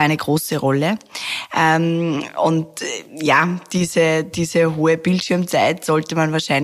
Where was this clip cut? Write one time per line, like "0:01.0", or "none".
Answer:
none